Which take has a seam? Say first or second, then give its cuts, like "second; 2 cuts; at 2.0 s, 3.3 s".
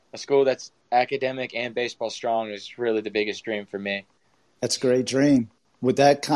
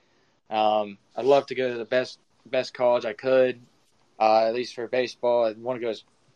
second; 2 cuts; at 1.1 s, 4.0 s